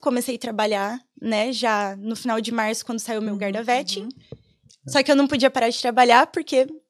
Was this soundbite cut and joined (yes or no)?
yes